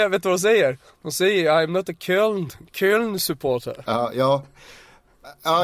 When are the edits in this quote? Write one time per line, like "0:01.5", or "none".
none